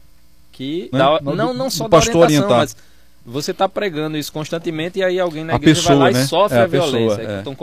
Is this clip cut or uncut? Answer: cut